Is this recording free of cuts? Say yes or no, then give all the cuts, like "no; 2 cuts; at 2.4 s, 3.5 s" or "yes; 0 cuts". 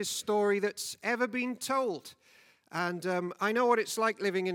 yes; 0 cuts